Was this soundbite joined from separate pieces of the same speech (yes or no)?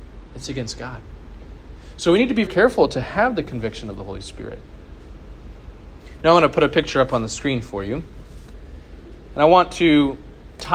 yes